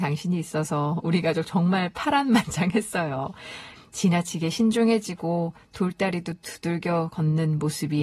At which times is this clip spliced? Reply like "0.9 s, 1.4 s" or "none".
3.8 s

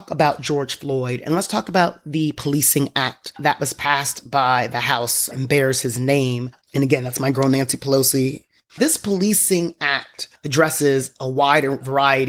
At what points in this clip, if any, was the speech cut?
6.6 s, 8.7 s

